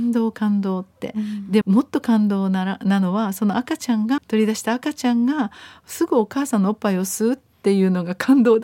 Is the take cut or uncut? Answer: cut